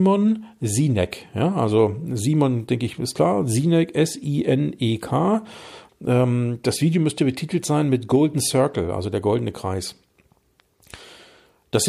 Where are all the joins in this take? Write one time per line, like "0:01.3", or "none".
0:05.9